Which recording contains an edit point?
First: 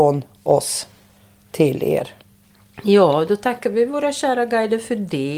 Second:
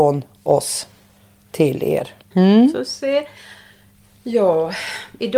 second; 1 cut; at 2.3 s

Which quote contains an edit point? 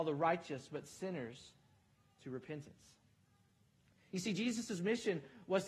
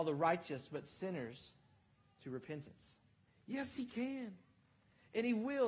second; 1 cut; at 3.3 s

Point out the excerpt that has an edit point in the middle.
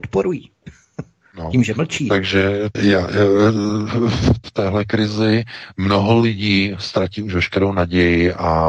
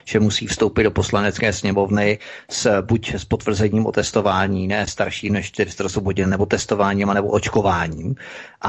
first; 2 cuts; at 2.7 s, 4.4 s

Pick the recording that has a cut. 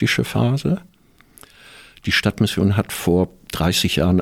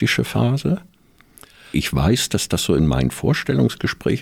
second; 1 cut; at 1.7 s

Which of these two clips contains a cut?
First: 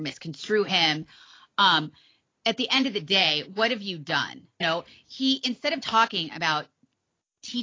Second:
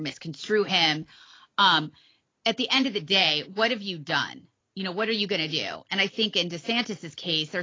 first; 2 cuts; at 4.6 s, 5.8 s

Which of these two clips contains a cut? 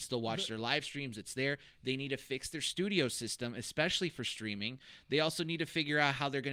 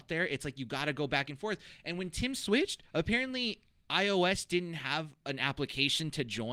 first; 1 cut; at 1.7 s

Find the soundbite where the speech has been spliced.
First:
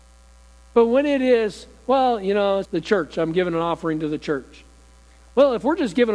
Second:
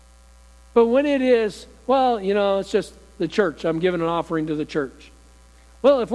first; 1 cut; at 2.6 s

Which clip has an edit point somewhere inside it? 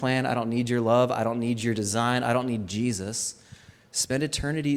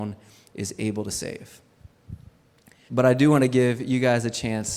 second; 1 cut; at 2.9 s

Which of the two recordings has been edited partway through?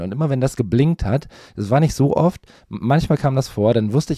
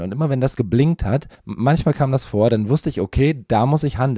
second; 1 cut; at 1.3 s

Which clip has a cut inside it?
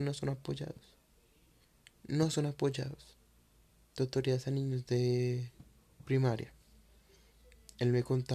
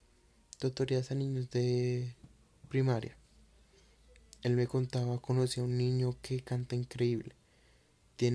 first; 1 cut; at 3.9 s

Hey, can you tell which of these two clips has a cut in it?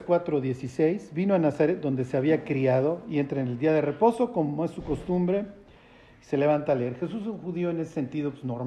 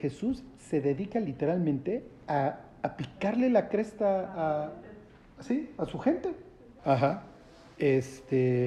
second; 1 cut; at 6.8 s

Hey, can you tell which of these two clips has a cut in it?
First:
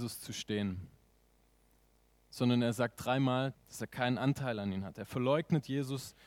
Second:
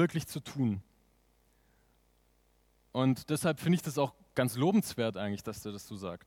first; 1 cut; at 3.5 s

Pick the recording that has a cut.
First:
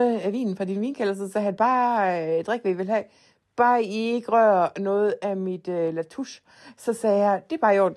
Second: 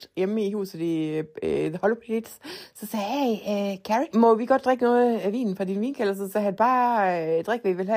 second; 1 cut; at 4.1 s

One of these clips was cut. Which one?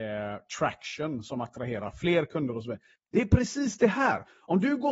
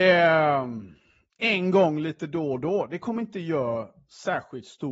first; 1 cut; at 3.0 s

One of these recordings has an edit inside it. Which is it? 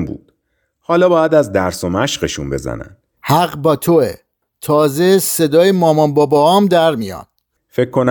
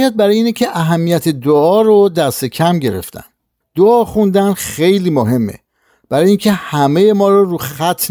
first; 1 cut; at 3.1 s

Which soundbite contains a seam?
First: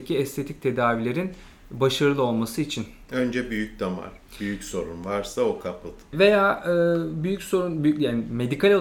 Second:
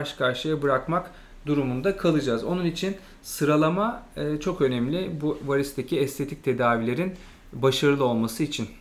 first; 1 cut; at 6.1 s

